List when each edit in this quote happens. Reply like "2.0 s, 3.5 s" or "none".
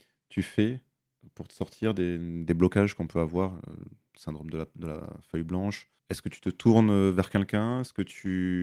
6.0 s